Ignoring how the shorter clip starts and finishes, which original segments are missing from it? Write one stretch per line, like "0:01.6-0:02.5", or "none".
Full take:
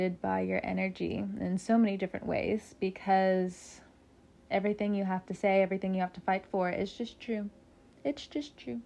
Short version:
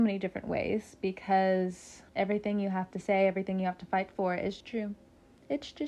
0:03.9-0:04.4
0:07.0-0:07.2

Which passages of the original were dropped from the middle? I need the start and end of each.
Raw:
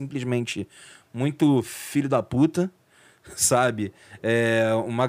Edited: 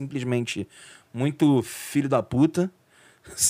none

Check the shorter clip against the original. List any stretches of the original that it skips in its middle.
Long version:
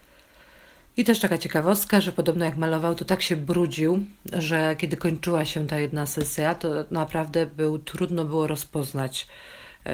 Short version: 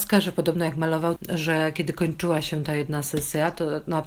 0:03.0-0:04.2

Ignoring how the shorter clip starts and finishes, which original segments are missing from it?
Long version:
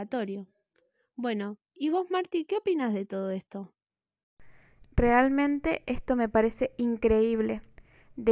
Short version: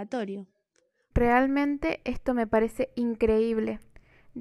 0:01.1-0:04.9

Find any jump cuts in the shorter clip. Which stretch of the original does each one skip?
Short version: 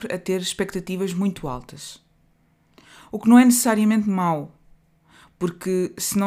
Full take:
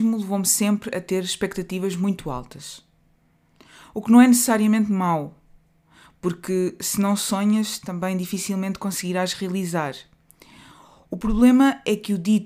none

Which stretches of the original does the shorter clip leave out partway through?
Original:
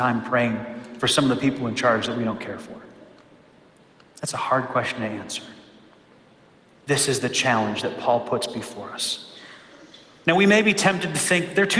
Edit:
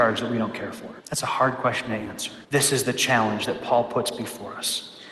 0:02.9-0:04.1
0:05.5-0:06.8

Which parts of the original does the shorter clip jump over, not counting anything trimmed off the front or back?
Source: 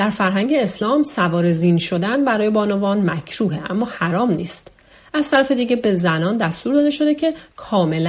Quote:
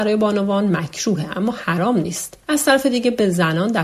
0:04.8-0:05.1

